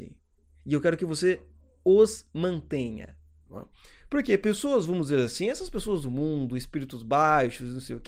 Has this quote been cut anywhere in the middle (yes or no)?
yes